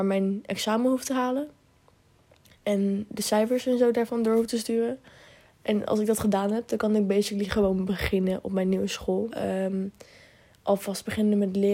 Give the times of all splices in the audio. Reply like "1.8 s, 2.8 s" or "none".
3.1 s, 9.3 s